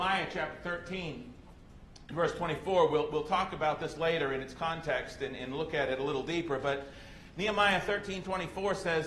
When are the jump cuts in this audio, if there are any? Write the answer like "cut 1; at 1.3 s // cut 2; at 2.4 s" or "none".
none